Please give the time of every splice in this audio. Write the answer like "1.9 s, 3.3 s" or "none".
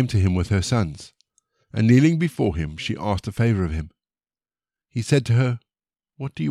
none

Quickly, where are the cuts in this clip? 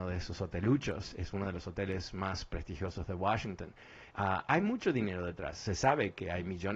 4.1 s

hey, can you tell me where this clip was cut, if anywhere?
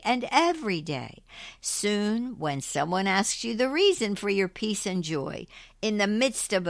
1.6 s

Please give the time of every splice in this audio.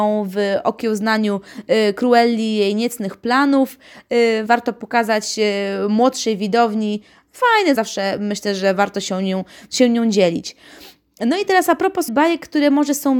4.5 s, 7.7 s, 12.1 s

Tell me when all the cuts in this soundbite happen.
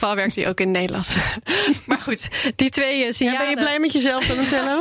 none

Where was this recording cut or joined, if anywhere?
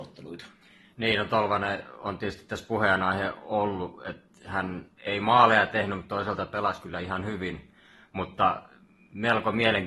none

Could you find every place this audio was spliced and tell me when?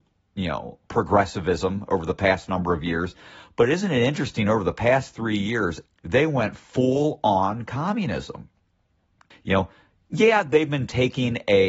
5.9 s, 9.3 s

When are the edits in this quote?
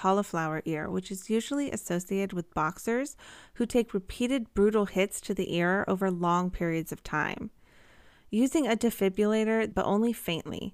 8.1 s, 9.7 s

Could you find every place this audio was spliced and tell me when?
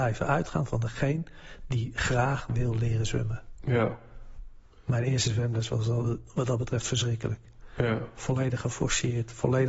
none

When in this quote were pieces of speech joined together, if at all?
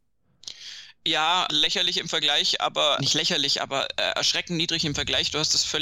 1.5 s, 3.0 s

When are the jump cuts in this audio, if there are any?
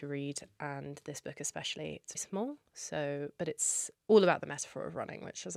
2.1 s, 3.9 s

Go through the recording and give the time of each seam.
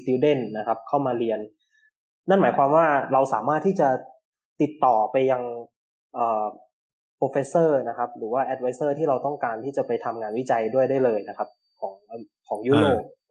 none

